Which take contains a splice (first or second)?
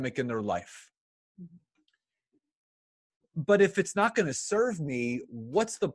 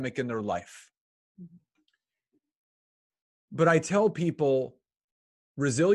first